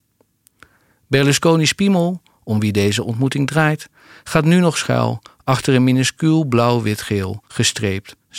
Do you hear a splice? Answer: no; 0 cuts

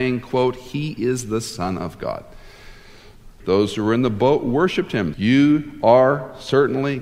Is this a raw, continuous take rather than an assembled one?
no; 2 cuts; at 3.4 s, 5.1 s

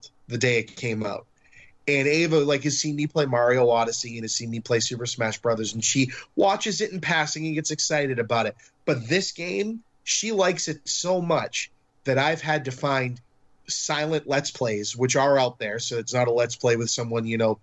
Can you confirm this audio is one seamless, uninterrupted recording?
yes; 0 cuts

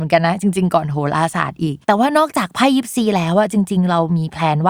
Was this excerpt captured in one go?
no; 1 cut; at 1.8 s

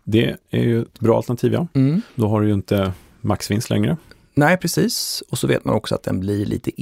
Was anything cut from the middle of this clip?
yes; 1 cut; at 2.1 s

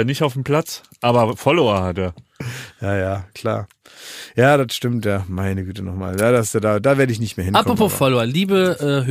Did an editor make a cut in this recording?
no; 0 cuts

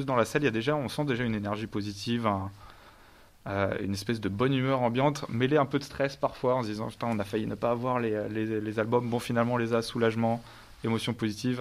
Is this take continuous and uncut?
yes; 0 cuts

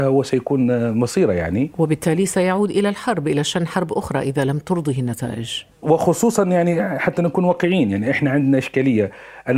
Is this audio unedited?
yes; 0 cuts

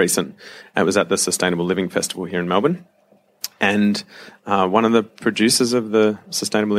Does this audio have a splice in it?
no; 0 cuts

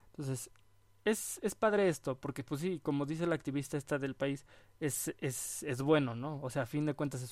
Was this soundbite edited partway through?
no; 0 cuts

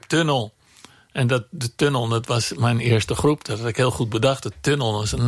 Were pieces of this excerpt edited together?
no; 0 cuts

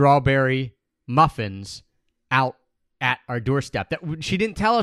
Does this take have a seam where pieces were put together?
no; 0 cuts

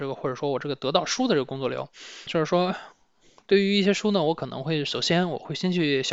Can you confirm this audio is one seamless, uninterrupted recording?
no; 1 cut; at 2.3 s

